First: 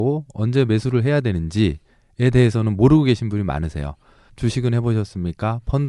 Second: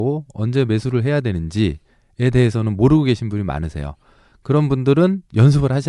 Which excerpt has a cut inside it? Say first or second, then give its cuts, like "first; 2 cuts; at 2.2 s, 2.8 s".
first; 1 cut; at 4.3 s